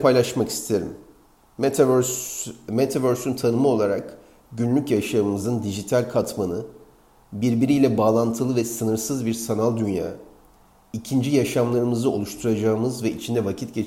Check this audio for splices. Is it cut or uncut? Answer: uncut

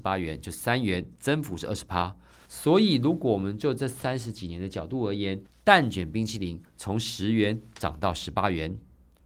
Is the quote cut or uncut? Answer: uncut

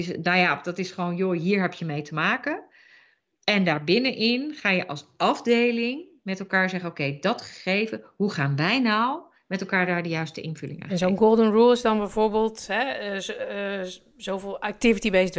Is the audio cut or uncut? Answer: uncut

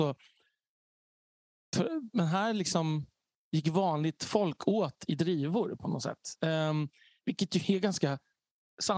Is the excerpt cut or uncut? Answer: uncut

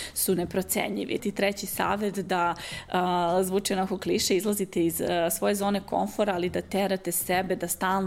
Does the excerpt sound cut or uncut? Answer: cut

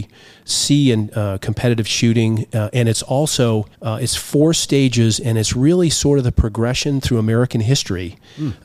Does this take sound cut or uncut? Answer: cut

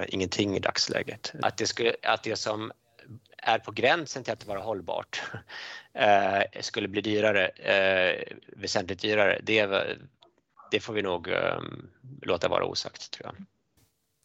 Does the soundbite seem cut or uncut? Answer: cut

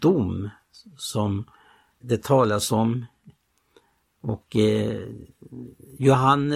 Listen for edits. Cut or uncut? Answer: cut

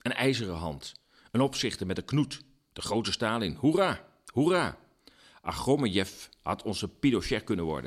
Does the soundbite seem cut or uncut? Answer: uncut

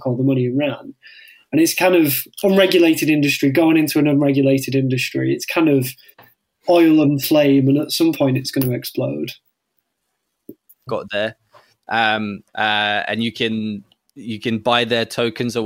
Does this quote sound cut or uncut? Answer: cut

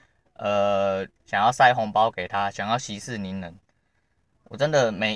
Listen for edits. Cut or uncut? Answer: cut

